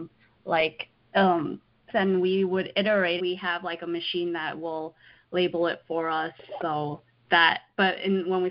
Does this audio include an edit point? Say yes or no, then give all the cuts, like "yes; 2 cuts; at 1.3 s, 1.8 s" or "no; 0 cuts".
yes; 2 cuts; at 1.9 s, 3.2 s